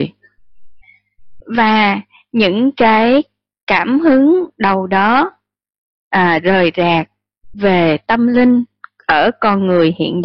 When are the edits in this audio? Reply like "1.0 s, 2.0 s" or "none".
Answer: none